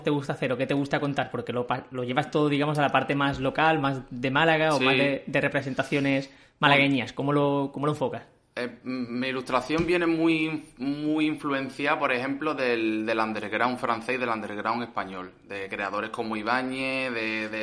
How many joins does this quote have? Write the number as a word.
zero